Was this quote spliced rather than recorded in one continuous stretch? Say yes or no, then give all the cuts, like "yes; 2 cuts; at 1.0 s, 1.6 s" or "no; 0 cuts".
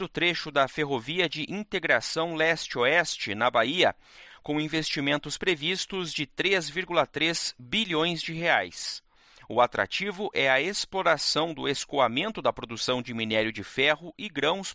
no; 0 cuts